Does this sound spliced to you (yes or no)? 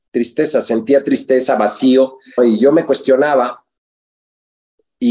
yes